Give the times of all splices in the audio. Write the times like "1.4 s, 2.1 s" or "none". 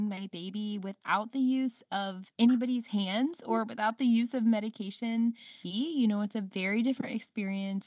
5.6 s